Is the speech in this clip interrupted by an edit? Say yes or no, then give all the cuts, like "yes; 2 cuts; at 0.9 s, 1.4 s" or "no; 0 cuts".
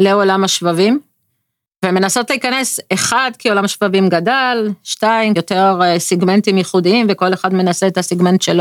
yes; 1 cut; at 5.4 s